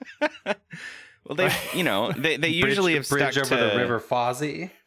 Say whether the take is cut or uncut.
uncut